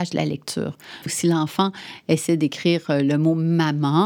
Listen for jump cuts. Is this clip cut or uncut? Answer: cut